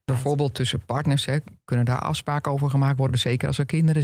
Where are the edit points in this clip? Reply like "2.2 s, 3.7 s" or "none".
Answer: none